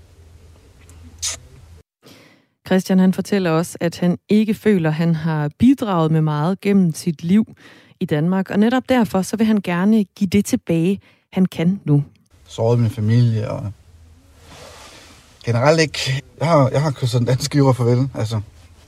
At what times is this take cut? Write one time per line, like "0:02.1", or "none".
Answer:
0:12.3
0:16.2